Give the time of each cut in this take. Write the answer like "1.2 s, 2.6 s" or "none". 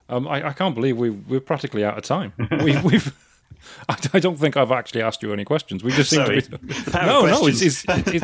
none